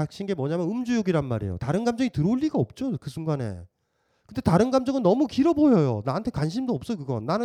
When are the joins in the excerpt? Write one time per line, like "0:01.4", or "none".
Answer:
none